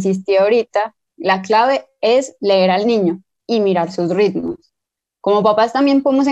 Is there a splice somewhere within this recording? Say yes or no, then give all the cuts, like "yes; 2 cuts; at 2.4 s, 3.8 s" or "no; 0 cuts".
no; 0 cuts